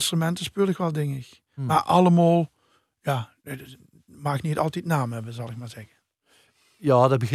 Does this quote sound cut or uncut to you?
uncut